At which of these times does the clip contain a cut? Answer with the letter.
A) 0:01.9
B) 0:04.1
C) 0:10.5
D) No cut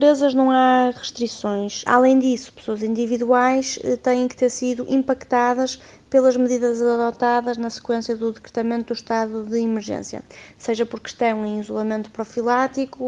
A